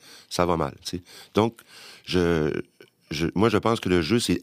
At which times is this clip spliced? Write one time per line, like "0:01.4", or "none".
none